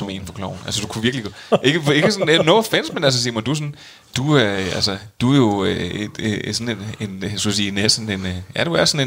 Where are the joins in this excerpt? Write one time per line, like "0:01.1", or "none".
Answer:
none